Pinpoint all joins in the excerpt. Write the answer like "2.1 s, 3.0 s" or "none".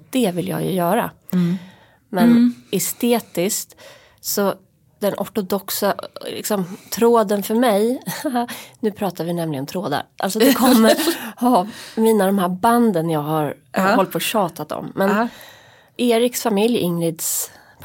2.0 s